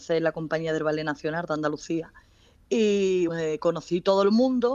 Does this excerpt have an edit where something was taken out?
yes; 1 cut; at 3.3 s

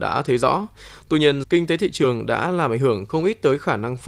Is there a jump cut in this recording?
yes; 1 cut; at 1.4 s

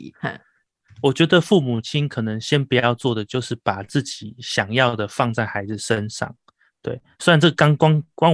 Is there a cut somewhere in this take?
no; 0 cuts

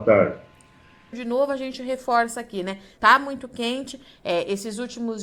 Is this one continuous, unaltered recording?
no; 2 cuts; at 1.1 s, 3.0 s

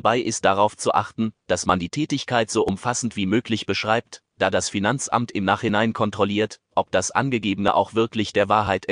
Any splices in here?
no; 0 cuts

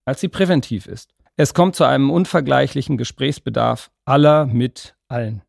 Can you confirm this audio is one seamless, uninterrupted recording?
no; 1 cut; at 1.3 s

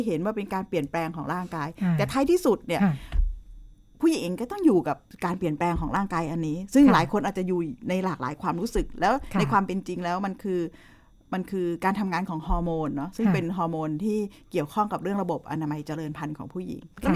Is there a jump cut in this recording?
no; 0 cuts

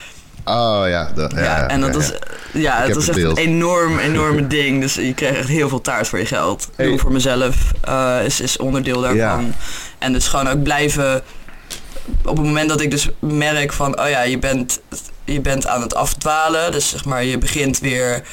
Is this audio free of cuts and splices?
no; 1 cut; at 6.8 s

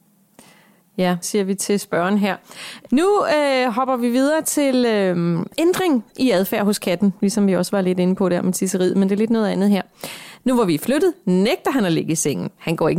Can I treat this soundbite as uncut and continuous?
no; 2 cuts; at 1.2 s, 10.4 s

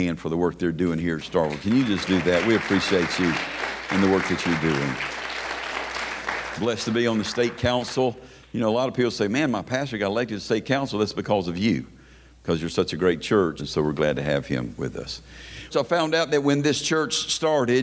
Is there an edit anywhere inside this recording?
yes; 2 cuts; at 13.6 s, 15.7 s

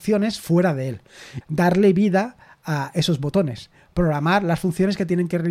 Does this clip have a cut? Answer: yes; 1 cut; at 1.4 s

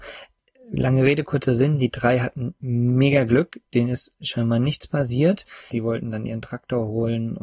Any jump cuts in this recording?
yes; 1 cut; at 5.7 s

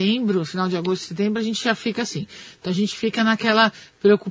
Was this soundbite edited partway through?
no; 0 cuts

